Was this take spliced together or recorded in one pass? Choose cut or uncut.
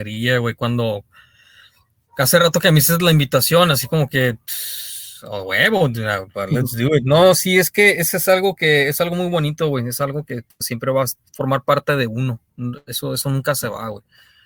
uncut